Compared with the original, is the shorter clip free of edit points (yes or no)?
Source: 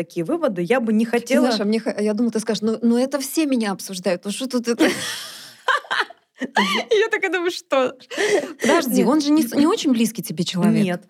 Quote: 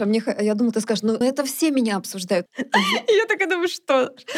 no